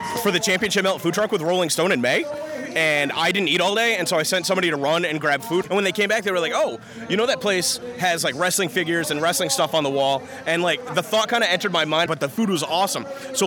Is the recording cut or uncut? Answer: cut